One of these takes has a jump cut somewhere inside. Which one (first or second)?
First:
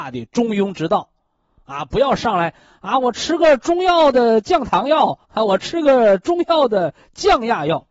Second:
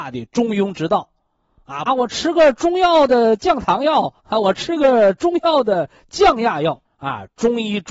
second